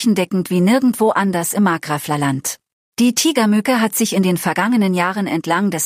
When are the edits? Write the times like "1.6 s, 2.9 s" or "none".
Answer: 2.9 s